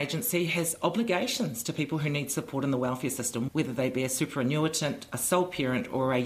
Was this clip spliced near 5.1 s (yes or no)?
no